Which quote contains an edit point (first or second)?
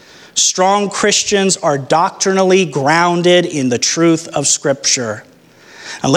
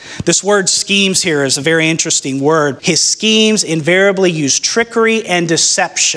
second